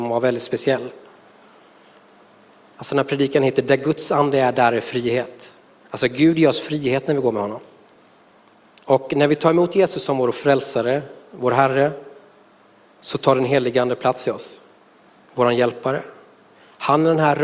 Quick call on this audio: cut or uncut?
uncut